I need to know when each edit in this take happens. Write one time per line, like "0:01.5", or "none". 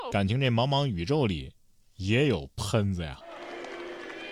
none